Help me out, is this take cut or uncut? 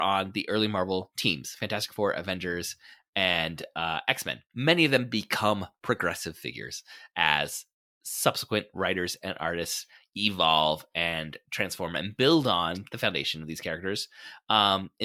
cut